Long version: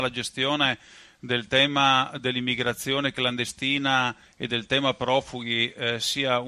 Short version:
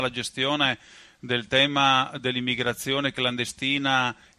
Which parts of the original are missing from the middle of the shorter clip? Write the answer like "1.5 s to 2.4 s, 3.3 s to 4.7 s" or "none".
none